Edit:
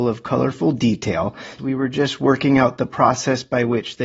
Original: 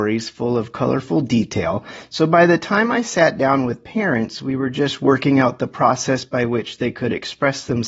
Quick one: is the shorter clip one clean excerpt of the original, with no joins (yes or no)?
no